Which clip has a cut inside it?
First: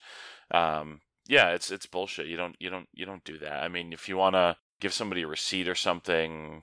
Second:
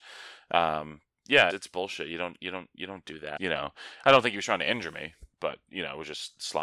second; 2 cuts; at 1.5 s, 3.4 s

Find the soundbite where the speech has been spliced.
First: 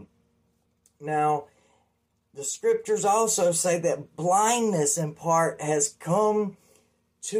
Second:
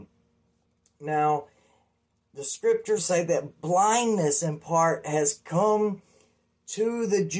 second; 1 cut; at 3.0 s

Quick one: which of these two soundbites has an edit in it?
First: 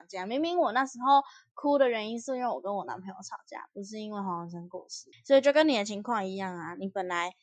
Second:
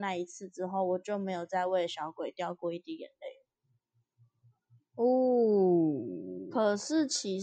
first; 1 cut; at 5.1 s

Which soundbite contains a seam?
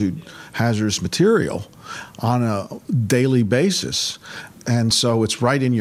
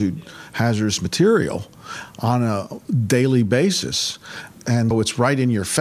second; 1 cut; at 4.9 s

